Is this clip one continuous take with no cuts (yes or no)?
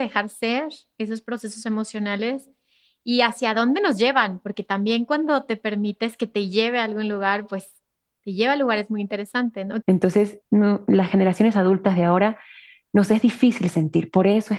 no